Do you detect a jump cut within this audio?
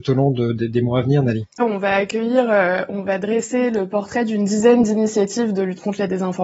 yes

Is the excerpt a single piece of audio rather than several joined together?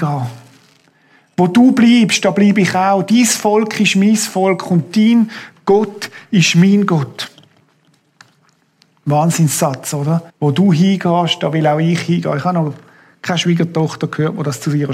no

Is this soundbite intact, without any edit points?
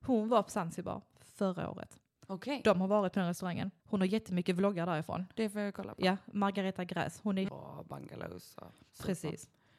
no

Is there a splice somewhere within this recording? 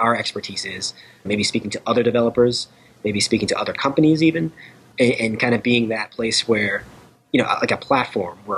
yes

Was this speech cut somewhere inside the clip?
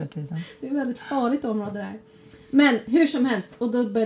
no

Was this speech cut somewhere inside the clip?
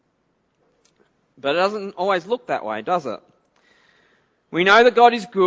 no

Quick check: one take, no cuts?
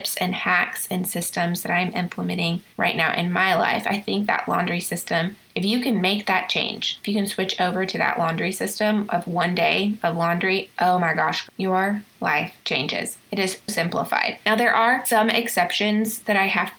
no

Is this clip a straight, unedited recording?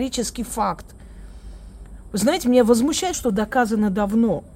no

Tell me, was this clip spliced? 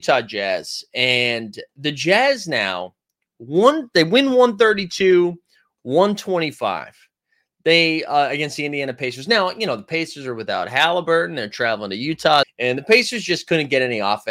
yes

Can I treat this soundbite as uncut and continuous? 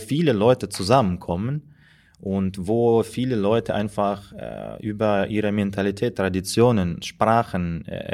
yes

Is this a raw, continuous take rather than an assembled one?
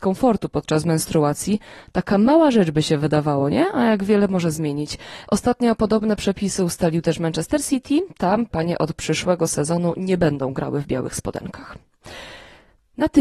yes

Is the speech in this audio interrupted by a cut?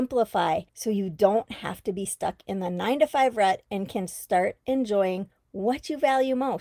no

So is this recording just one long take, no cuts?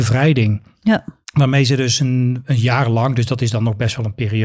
yes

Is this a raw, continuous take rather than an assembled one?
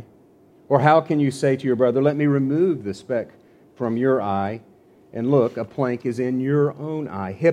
yes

